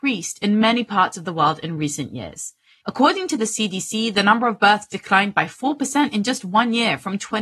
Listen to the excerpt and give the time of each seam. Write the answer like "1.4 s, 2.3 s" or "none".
2.8 s